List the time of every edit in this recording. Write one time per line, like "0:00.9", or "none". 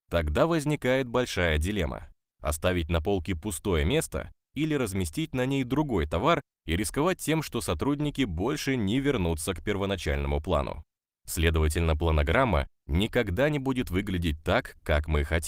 none